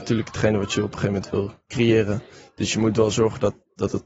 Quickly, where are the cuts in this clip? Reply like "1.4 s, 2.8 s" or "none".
none